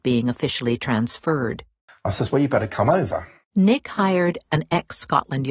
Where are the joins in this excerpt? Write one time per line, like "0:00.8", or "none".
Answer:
0:01.9
0:03.4